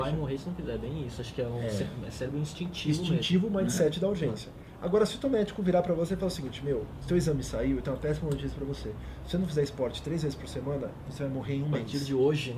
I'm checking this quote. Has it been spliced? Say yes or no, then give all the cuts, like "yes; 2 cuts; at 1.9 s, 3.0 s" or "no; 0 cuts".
no; 0 cuts